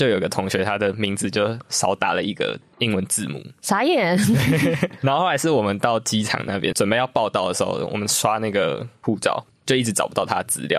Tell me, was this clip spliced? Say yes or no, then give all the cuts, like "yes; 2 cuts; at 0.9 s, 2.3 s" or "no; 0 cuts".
no; 0 cuts